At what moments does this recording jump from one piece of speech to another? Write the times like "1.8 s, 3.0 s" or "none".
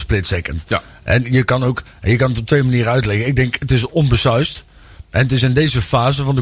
none

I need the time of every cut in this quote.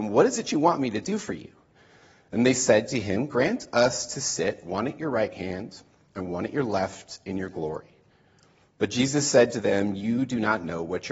none

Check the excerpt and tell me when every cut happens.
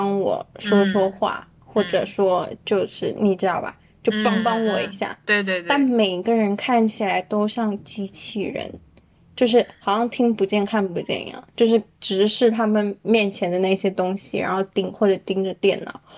none

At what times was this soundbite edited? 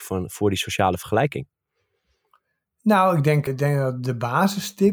3.5 s

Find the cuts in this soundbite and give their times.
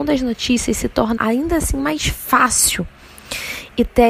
1.2 s

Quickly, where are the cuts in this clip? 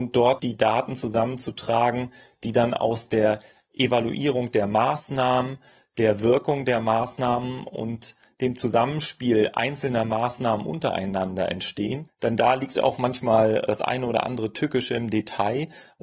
none

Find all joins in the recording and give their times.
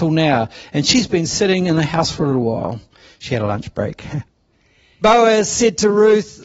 5.0 s

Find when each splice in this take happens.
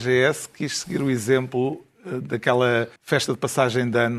3.0 s

